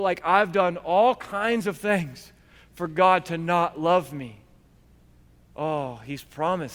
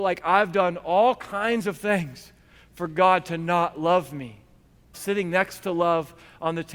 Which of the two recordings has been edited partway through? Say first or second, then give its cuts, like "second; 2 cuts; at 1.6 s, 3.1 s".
second; 1 cut; at 4.9 s